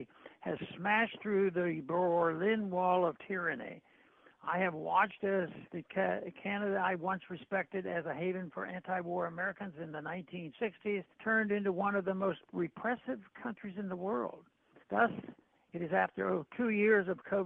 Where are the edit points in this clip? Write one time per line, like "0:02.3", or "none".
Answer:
0:11.1
0:14.8